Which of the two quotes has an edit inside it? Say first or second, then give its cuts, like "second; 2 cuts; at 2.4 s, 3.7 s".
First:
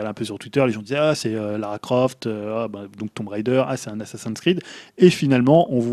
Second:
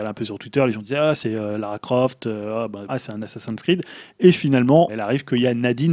second; 2 cuts; at 2.9 s, 4.9 s